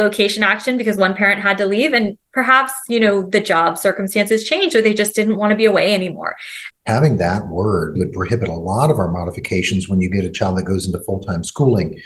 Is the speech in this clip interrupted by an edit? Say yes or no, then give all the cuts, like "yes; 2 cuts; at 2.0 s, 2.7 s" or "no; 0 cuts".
yes; 2 cuts; at 6.7 s, 8.0 s